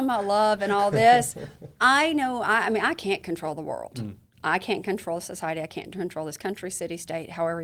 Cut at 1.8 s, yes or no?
yes